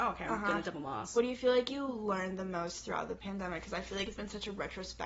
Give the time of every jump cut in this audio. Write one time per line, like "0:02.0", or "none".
none